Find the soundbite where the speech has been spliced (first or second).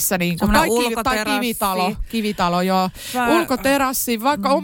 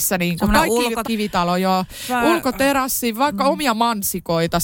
second